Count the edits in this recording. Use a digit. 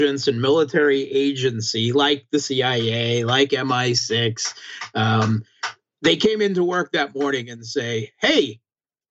0